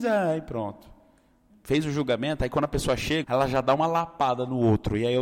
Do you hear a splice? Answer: yes; 2 cuts; at 1.5 s, 3.2 s

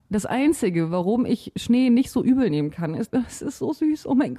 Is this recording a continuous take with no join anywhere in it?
no; 1 cut; at 3.1 s

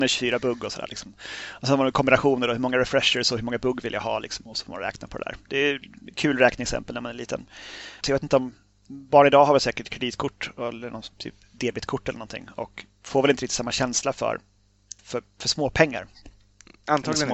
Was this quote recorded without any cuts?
no; 2 cuts; at 8.0 s, 15.0 s

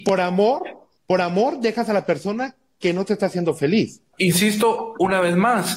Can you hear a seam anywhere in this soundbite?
yes; 2 cuts; at 1.0 s, 4.1 s

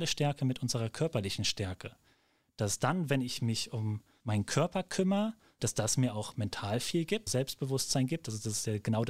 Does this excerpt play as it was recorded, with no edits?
no; 3 cuts; at 4.2 s, 5.6 s, 7.3 s

